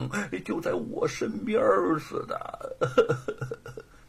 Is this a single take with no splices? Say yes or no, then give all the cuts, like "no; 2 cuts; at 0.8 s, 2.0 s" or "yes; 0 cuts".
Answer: yes; 0 cuts